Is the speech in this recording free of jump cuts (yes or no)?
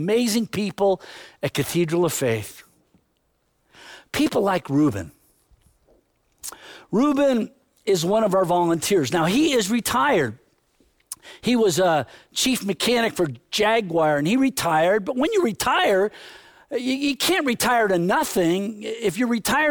yes